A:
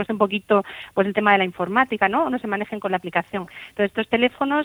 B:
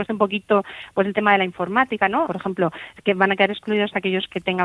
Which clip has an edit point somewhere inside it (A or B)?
B